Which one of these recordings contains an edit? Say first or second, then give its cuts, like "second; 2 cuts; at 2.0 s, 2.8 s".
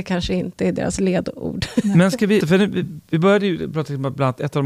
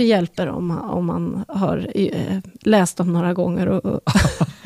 first; 1 cut; at 2.4 s